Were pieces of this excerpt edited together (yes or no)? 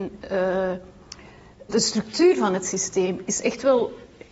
yes